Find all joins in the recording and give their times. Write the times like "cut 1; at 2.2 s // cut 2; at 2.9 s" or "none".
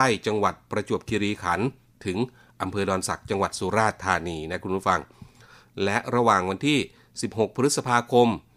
none